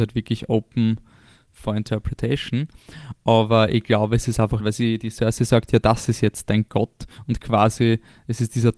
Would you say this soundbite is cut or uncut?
cut